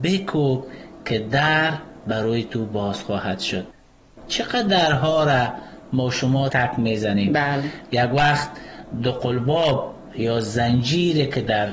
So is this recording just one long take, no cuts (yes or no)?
no